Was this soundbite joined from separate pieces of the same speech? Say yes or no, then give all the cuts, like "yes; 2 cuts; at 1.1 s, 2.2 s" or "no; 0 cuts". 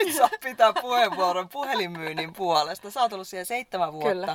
no; 0 cuts